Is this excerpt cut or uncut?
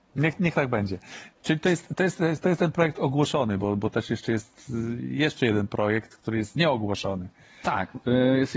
uncut